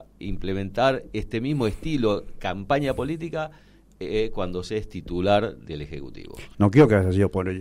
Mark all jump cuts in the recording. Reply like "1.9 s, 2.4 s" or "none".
6.5 s